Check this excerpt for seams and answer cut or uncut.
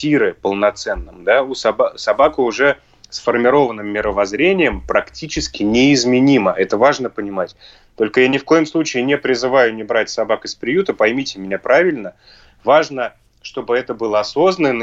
uncut